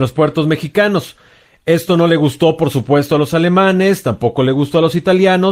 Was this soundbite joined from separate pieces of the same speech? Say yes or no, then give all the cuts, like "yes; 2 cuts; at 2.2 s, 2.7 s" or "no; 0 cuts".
no; 0 cuts